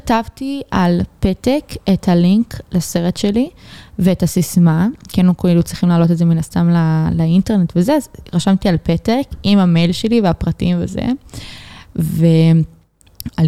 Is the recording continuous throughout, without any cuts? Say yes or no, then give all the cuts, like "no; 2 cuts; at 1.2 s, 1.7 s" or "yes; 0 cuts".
yes; 0 cuts